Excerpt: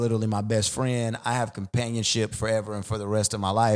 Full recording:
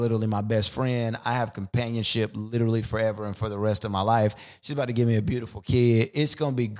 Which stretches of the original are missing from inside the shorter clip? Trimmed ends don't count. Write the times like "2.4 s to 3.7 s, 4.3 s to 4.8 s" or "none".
2.3 s to 2.8 s